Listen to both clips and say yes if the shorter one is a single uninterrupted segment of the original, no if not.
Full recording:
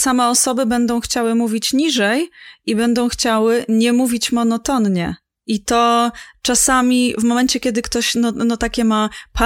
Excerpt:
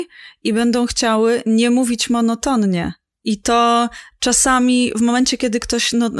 yes